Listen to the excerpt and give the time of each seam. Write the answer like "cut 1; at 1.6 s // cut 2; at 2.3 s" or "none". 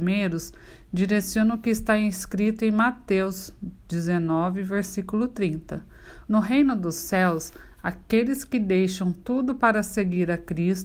cut 1; at 6.3 s